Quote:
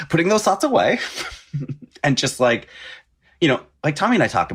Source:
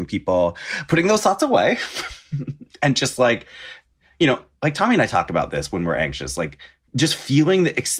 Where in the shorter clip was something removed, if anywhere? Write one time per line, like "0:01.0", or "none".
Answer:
none